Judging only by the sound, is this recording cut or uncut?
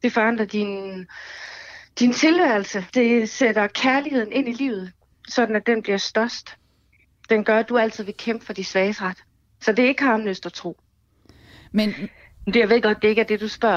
cut